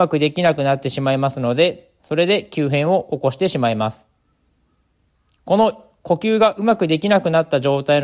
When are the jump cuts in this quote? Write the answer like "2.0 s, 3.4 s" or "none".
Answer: none